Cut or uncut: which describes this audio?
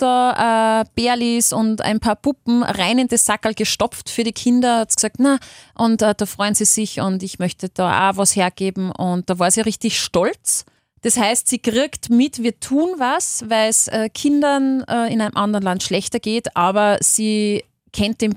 uncut